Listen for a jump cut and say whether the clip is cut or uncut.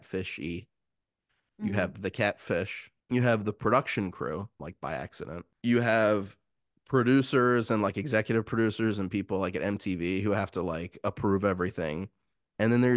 cut